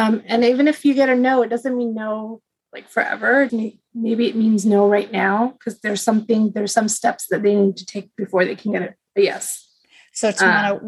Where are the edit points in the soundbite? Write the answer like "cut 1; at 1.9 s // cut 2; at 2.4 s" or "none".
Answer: cut 1; at 3.5 s

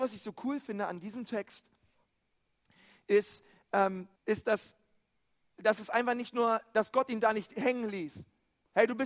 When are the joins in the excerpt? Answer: cut 1; at 4.2 s

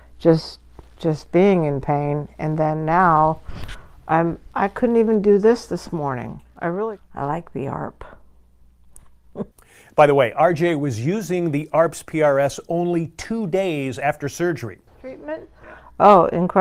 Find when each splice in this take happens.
cut 1; at 14.9 s

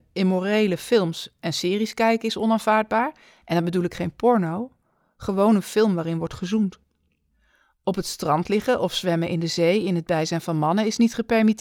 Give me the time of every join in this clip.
none

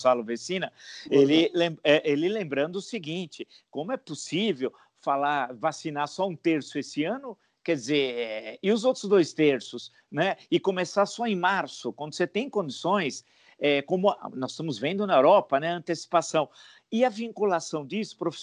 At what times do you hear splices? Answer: none

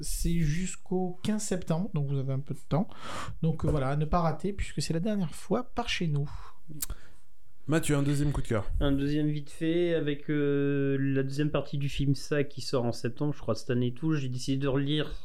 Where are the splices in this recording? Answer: none

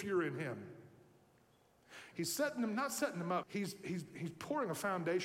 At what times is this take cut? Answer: cut 1; at 2.1 s // cut 2; at 3.4 s

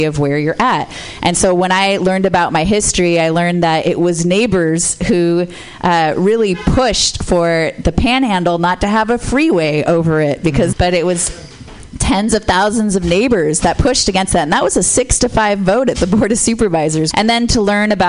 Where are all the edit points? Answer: cut 1; at 10.7 s // cut 2; at 17.1 s

